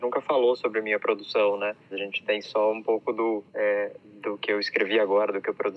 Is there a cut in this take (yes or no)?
yes